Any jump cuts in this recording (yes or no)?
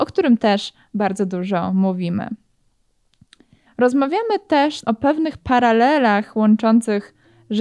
yes